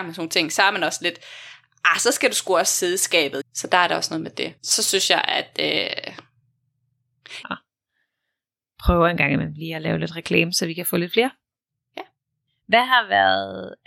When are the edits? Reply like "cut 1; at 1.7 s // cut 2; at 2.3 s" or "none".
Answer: cut 1; at 3.4 s // cut 2; at 4.6 s // cut 3; at 7.4 s

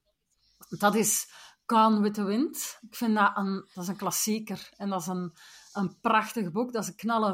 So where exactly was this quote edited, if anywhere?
none

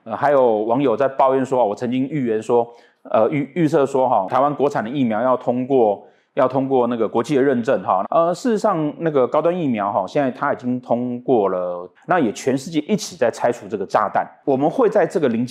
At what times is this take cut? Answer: cut 1; at 8.0 s // cut 2; at 12.0 s

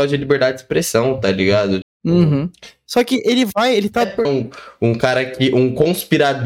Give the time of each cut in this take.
cut 1; at 1.8 s // cut 2; at 4.2 s

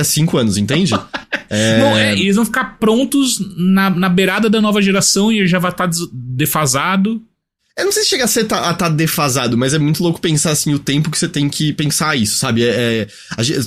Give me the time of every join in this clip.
none

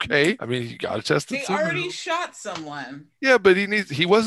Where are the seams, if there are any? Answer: none

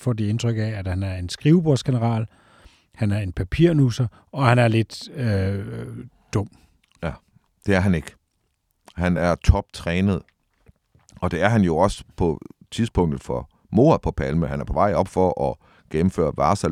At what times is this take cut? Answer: none

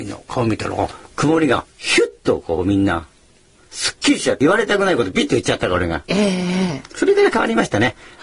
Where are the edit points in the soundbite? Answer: cut 1; at 1.0 s

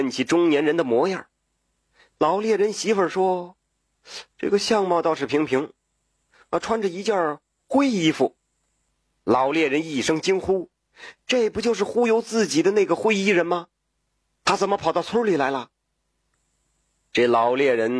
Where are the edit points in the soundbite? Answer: none

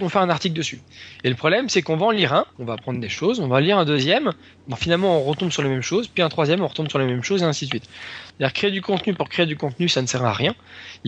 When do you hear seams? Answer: cut 1; at 8.3 s

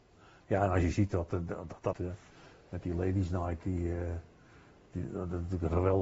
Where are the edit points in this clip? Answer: cut 1; at 1.9 s

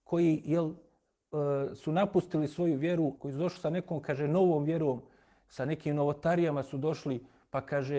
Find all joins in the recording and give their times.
cut 1; at 3.2 s

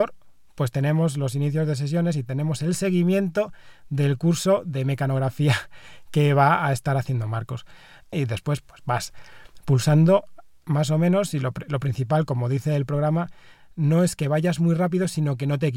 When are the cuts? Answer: cut 1; at 8.1 s

